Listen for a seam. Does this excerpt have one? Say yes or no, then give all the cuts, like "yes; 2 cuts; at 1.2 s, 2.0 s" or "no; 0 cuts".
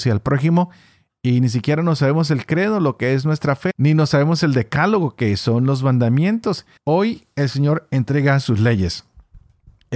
yes; 2 cuts; at 3.7 s, 6.8 s